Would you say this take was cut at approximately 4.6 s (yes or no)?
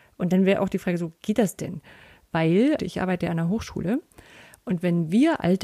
no